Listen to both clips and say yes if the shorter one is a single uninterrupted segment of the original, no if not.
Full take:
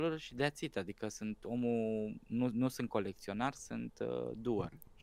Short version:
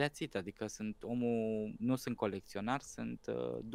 no